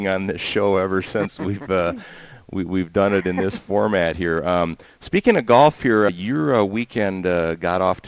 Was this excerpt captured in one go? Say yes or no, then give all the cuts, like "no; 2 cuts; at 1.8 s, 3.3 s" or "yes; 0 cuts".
no; 1 cut; at 6.1 s